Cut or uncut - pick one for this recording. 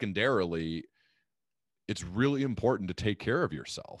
uncut